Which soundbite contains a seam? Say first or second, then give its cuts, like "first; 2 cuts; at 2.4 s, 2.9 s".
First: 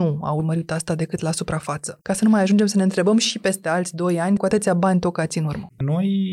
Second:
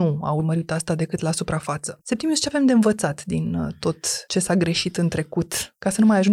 first; 2 cuts; at 2.0 s, 4.4 s